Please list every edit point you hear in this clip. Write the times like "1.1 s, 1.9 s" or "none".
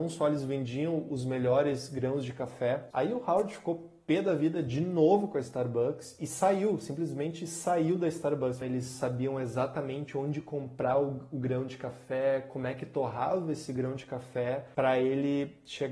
2.9 s, 8.6 s

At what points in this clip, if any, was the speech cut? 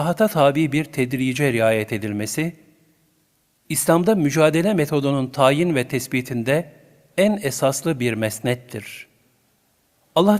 none

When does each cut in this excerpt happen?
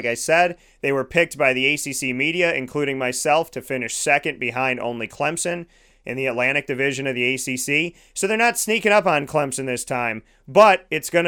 none

